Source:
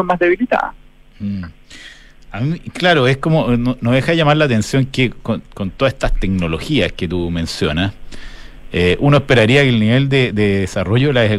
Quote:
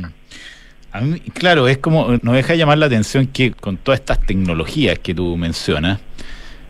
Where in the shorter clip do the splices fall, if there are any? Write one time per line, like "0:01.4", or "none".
0:02.2
0:03.5